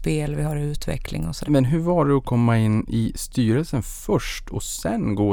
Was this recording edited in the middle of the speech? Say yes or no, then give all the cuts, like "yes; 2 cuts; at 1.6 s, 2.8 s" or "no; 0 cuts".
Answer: yes; 1 cut; at 1.4 s